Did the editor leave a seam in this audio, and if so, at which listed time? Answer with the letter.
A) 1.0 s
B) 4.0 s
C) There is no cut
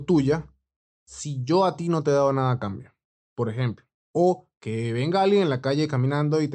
C